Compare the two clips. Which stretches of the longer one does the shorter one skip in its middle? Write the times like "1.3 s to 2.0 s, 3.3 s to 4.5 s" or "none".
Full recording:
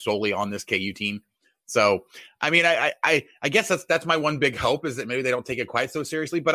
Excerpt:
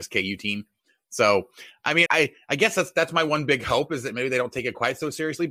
2.6 s to 3.0 s